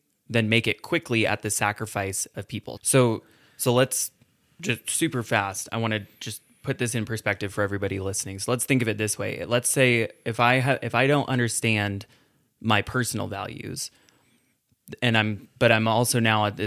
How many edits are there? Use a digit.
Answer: 1